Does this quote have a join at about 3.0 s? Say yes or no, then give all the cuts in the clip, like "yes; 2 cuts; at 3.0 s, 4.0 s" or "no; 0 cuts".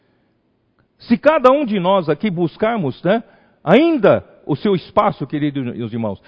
no; 0 cuts